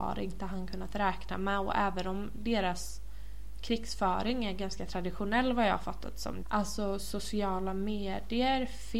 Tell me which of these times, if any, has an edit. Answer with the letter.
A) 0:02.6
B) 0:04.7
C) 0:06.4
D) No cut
C